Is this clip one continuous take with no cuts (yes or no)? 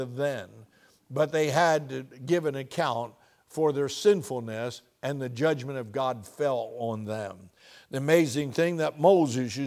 yes